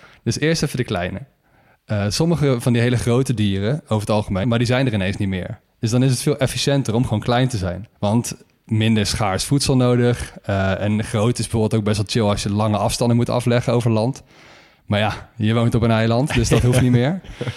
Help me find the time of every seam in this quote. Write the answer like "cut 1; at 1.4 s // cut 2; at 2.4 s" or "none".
cut 1; at 4.4 s // cut 2; at 8.0 s